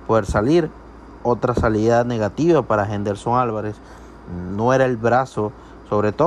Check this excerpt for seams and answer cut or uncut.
uncut